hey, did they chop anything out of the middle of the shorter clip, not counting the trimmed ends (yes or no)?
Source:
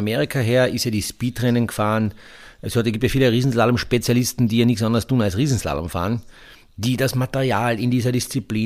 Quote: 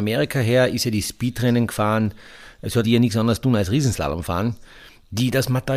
yes